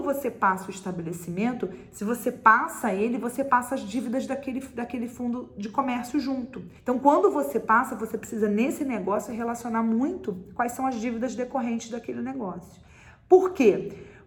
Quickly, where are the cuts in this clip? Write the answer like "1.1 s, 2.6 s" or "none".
6.8 s